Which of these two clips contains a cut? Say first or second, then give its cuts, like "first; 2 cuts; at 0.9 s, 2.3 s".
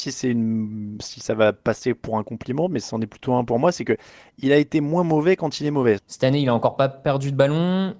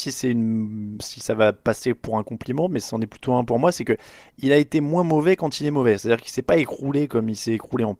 first; 1 cut; at 6.0 s